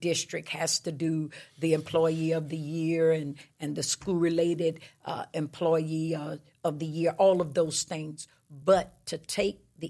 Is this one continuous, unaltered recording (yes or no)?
yes